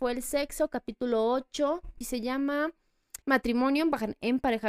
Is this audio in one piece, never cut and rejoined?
no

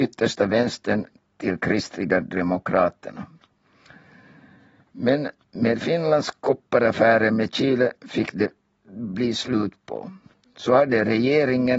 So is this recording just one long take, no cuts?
yes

